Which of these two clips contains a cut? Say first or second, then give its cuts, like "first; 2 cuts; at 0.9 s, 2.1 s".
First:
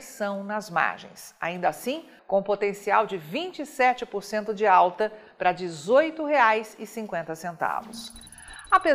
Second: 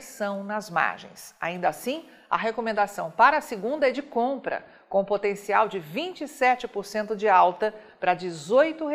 first; 1 cut; at 2.2 s